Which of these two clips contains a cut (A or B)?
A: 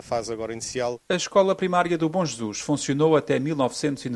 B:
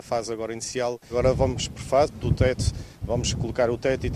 B